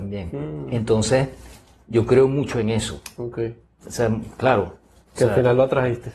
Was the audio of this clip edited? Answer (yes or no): no